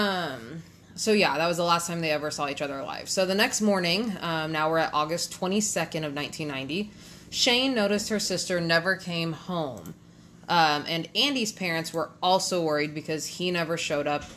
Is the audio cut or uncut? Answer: uncut